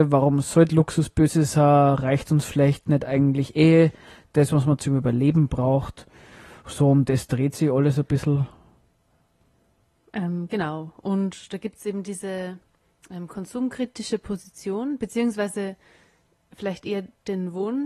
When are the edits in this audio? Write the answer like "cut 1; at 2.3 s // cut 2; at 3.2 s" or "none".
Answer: none